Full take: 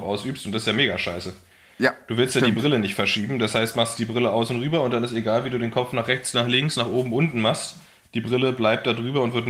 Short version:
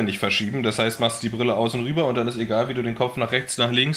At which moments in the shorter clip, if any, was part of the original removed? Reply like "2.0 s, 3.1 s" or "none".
none